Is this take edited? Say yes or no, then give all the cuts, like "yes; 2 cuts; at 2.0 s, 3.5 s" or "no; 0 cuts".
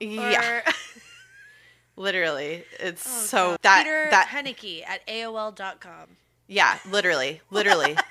yes; 1 cut; at 3.6 s